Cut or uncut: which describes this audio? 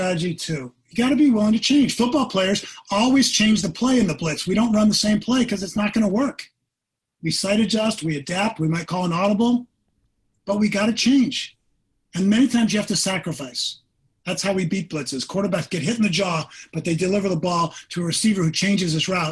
uncut